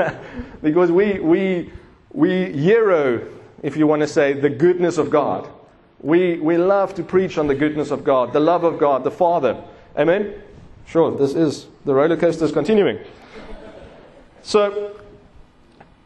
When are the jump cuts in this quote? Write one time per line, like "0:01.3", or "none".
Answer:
none